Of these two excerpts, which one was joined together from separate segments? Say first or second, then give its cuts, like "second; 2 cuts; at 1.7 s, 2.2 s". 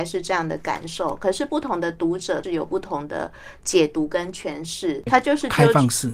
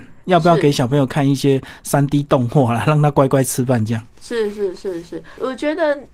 first; 2 cuts; at 2.4 s, 5.1 s